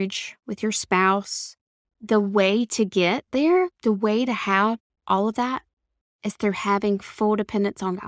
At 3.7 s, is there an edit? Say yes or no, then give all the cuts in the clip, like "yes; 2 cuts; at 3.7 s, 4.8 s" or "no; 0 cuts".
yes; 2 cuts; at 1.8 s, 3.7 s